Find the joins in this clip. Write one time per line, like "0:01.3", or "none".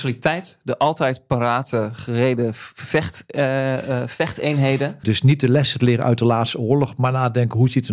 0:05.0